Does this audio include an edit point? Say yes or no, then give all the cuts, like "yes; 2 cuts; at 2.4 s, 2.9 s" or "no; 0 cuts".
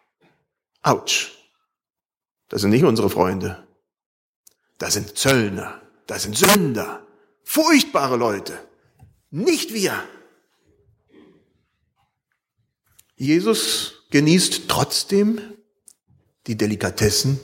no; 0 cuts